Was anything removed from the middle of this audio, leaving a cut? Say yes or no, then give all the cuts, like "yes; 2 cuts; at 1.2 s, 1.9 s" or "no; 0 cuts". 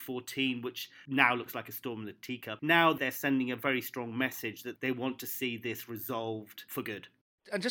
yes; 1 cut; at 2.6 s